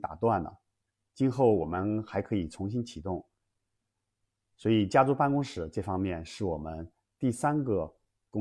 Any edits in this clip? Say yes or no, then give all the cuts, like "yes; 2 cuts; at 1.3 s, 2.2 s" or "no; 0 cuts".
no; 0 cuts